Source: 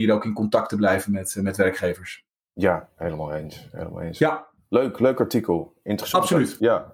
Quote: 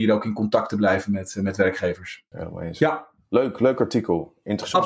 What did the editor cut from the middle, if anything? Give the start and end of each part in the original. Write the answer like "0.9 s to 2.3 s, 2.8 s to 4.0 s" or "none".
2.3 s to 3.7 s